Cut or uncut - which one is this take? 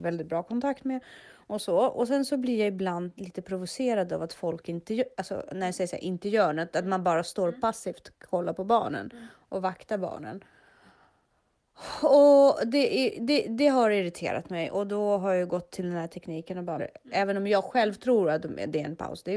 cut